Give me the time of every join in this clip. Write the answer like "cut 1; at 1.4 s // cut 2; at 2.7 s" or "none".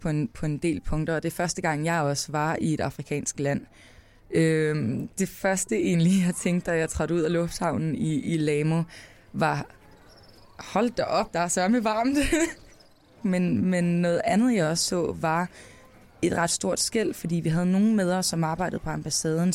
none